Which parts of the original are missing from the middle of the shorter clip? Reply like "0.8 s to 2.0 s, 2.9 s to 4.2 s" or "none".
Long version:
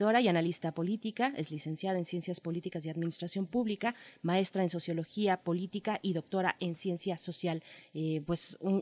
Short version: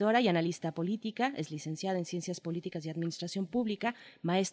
none